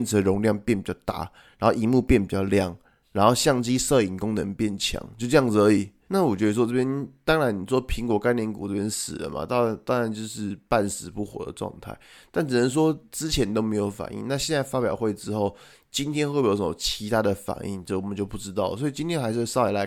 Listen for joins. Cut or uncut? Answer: cut